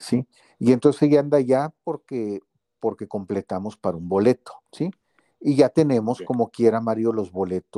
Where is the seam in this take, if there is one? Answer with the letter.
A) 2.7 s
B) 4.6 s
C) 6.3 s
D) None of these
B